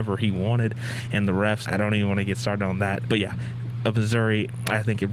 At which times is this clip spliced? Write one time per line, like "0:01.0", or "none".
0:01.6
0:03.0